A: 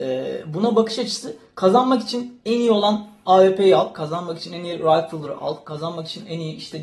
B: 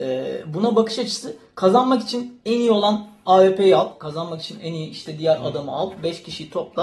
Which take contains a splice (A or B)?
B